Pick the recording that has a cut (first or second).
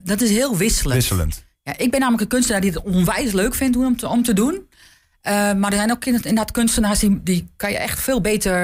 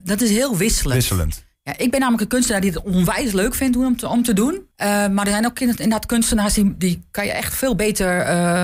second